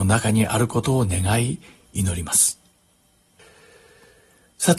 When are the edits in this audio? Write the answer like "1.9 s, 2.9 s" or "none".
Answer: none